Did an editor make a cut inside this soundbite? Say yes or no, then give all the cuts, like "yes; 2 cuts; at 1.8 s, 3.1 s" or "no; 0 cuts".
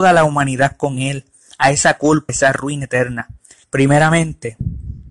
yes; 2 cuts; at 2.3 s, 3.6 s